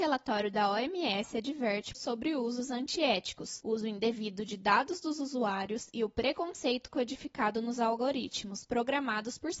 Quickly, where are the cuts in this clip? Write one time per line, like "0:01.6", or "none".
0:01.9